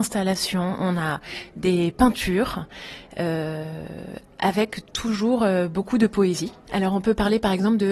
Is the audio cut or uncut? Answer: uncut